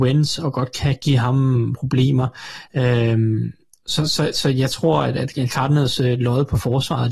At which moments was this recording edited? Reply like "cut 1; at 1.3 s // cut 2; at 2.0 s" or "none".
cut 1; at 2.7 s